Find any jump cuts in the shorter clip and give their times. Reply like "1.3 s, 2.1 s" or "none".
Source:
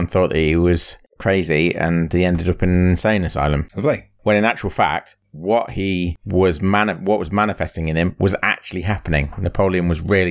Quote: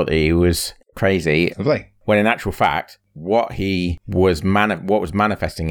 1.5 s